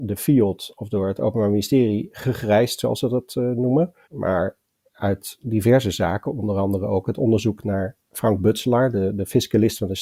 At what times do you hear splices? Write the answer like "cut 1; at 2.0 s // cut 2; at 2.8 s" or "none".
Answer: cut 1; at 4.0 s